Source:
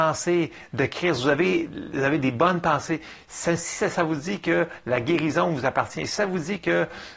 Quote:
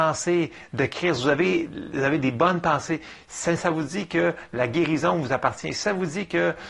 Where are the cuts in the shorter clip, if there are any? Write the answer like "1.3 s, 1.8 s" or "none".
3.6 s